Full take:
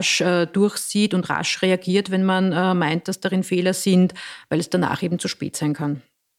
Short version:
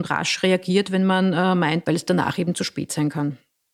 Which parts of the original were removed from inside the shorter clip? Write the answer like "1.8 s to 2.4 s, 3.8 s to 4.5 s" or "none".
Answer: 3.0 s to 4.5 s